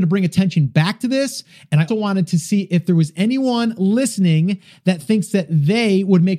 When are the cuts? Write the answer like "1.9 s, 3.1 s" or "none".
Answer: 1.9 s